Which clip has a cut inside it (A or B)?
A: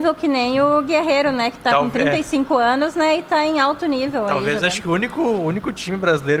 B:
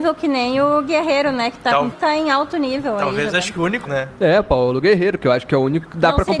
B